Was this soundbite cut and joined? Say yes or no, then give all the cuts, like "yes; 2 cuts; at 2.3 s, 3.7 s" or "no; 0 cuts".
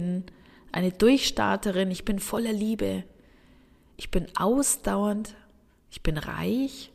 yes; 1 cut; at 1.9 s